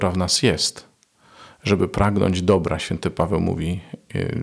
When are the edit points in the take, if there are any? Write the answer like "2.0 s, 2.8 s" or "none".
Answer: none